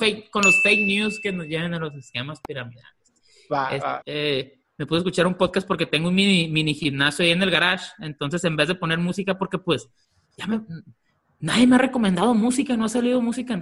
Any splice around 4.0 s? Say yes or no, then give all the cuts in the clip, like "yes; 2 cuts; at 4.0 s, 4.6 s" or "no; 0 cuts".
yes; 1 cut; at 4.0 s